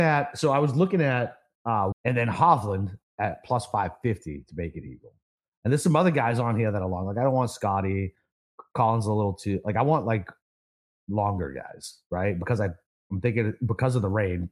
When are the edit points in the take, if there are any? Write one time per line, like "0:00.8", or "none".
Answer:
0:01.9